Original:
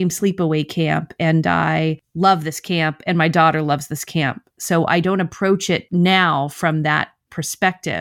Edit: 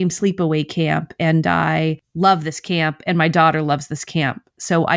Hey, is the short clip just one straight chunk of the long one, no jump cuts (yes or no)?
yes